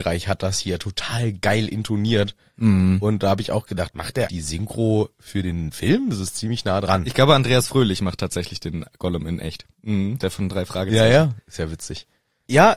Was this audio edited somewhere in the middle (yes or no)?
yes